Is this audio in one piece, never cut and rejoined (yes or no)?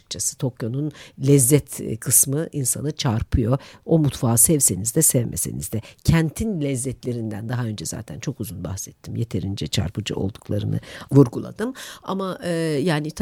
yes